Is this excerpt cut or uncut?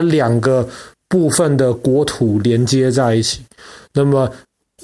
uncut